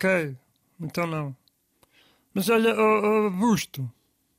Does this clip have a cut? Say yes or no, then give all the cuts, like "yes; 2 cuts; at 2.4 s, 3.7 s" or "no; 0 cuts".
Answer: no; 0 cuts